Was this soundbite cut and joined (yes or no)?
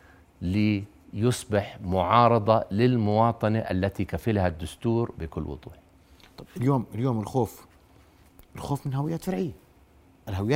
no